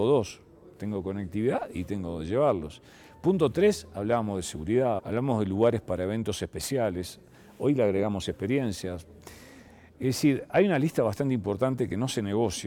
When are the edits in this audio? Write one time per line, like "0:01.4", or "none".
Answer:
0:05.0